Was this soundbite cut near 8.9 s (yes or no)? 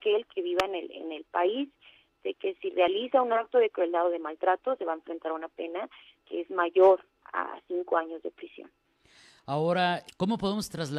no